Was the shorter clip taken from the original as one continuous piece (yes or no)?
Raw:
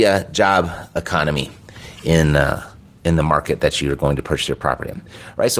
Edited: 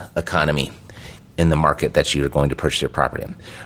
no